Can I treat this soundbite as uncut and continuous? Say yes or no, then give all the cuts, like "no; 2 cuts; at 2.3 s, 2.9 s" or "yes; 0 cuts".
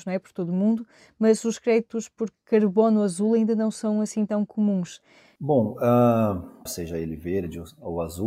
no; 2 cuts; at 5.4 s, 6.7 s